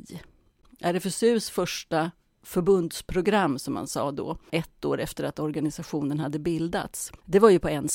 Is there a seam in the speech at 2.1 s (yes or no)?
no